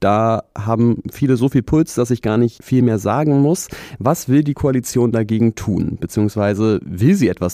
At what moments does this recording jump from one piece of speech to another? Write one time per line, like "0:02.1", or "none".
none